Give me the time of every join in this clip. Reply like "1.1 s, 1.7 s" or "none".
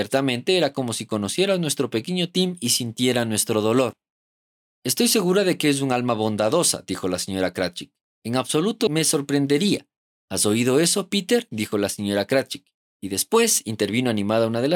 8.1 s, 10.1 s